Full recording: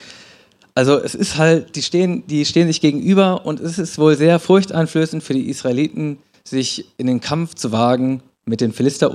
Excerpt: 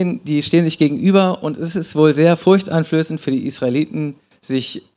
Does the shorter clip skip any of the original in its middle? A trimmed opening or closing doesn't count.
no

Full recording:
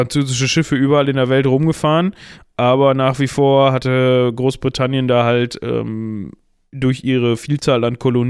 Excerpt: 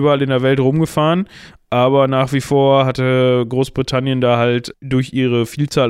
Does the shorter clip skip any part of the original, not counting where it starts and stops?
yes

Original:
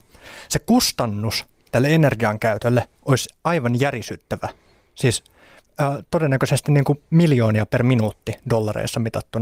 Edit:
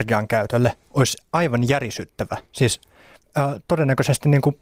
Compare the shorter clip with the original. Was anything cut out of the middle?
yes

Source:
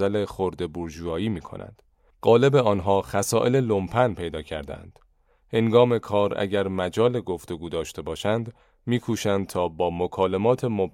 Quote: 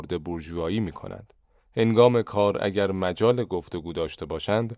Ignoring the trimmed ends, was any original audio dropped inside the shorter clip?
yes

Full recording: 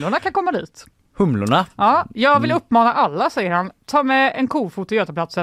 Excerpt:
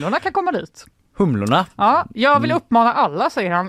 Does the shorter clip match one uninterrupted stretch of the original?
yes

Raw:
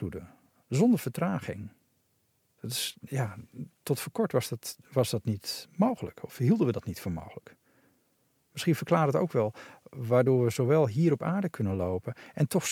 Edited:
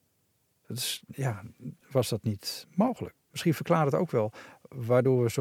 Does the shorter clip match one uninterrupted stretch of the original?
no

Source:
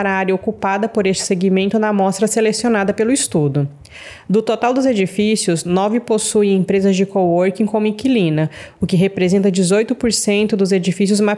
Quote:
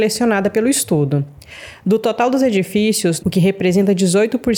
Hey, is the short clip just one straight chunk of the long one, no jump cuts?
no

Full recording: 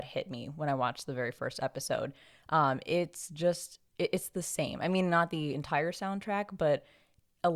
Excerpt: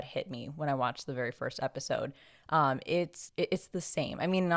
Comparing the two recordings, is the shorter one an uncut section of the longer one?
no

